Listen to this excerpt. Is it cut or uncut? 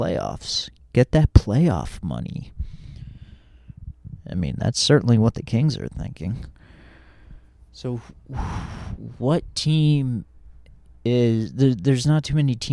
uncut